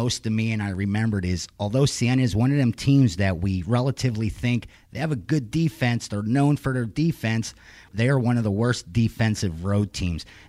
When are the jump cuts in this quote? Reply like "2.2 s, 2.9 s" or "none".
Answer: 7.9 s